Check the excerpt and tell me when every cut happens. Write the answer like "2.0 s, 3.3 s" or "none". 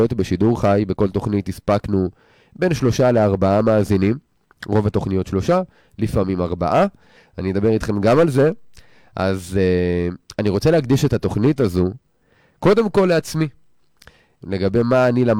7.2 s, 14.4 s